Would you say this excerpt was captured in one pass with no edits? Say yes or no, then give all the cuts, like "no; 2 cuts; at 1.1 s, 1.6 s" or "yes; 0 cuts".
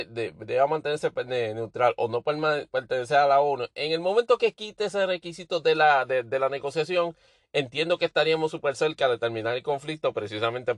yes; 0 cuts